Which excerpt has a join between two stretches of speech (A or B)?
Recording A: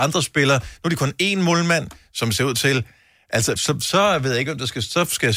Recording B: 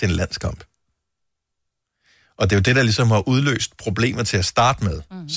A